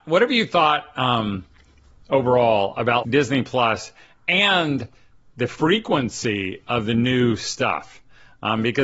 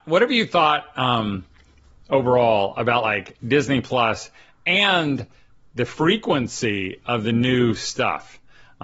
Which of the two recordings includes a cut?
first; 1 cut; at 3.0 s

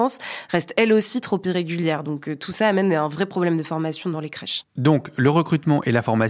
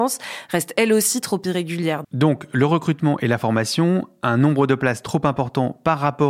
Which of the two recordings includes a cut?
second; 1 cut; at 2.0 s

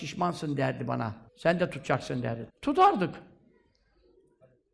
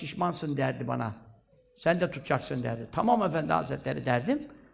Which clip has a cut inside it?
first; 2 cuts; at 1.3 s, 2.5 s

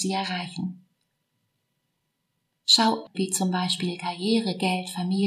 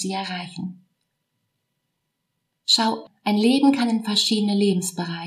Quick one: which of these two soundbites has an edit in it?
first; 1 cut; at 3.1 s

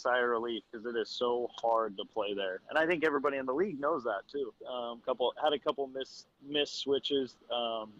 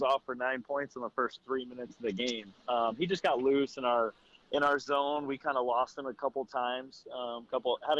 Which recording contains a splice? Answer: first; 1 cut; at 4.6 s

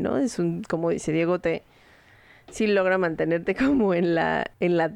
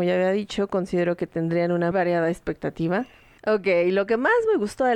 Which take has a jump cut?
second; 2 cuts; at 1.9 s, 3.4 s

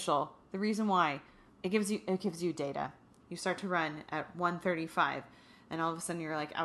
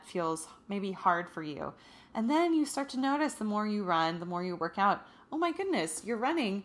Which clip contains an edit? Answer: first; 2 cuts; at 1.5 s, 3.2 s

